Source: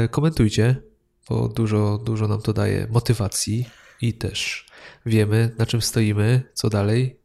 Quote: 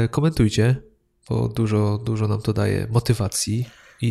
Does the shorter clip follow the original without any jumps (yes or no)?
yes